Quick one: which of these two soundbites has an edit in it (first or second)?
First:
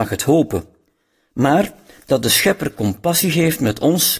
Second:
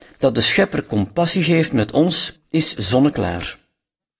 second